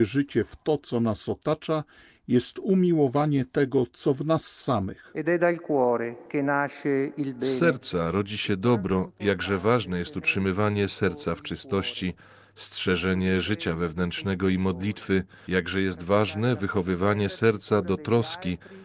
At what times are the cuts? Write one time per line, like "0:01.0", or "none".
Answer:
none